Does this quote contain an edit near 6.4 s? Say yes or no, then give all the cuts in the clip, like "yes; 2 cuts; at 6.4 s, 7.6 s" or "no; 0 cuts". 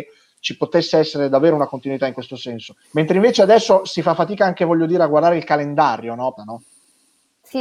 yes; 2 cuts; at 2.8 s, 6.4 s